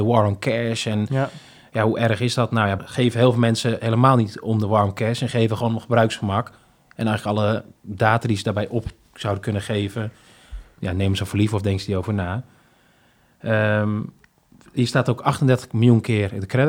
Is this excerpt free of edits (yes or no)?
no